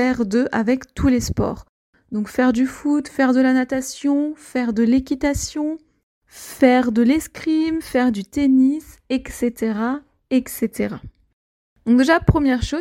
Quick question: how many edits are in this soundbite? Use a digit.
0